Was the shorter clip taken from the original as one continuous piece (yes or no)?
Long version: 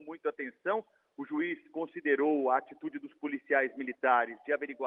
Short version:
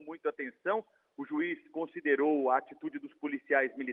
yes